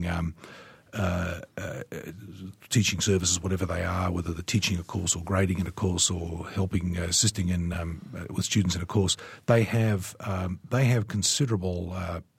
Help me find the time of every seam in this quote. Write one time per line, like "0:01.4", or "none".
none